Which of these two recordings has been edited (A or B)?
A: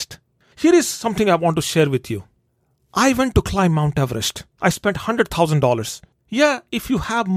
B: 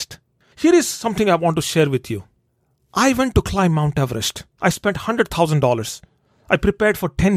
A